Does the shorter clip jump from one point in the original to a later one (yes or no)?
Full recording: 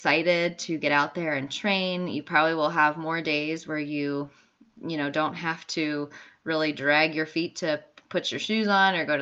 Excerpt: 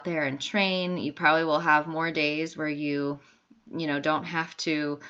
no